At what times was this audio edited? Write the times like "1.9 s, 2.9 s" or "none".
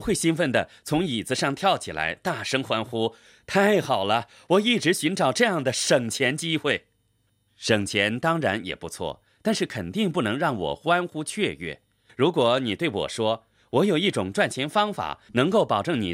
none